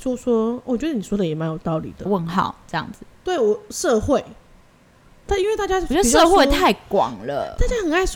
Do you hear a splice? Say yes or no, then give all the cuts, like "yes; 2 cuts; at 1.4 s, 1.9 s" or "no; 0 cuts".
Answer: yes; 1 cut; at 2.1 s